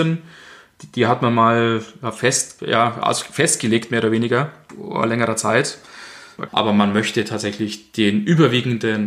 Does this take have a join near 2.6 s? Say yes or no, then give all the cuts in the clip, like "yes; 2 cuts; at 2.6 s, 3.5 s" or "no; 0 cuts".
no; 1 cut; at 6.5 s